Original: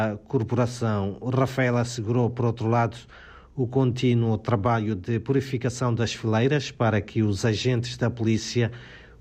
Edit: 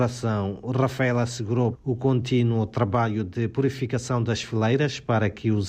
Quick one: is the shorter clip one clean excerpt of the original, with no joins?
no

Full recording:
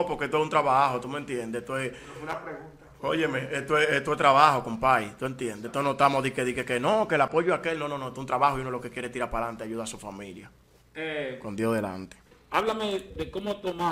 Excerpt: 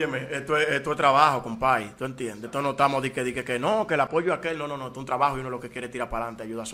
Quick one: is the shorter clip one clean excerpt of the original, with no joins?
yes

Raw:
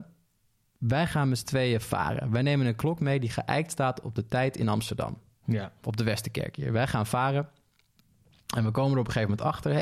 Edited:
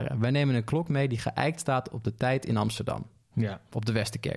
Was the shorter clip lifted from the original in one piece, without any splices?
yes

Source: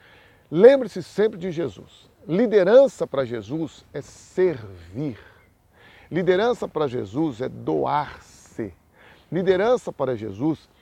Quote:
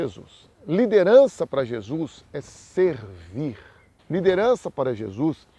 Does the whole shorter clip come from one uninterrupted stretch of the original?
no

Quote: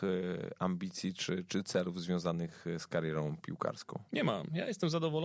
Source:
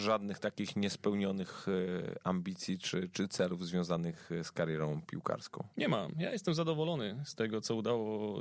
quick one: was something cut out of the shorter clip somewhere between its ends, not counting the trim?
no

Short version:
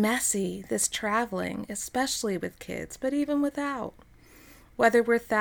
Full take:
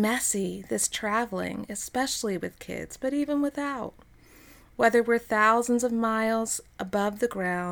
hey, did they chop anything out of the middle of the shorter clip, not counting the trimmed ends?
no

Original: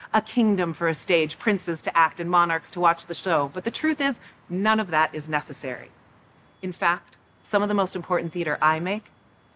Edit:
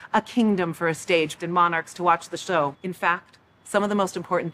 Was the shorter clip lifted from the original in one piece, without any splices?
no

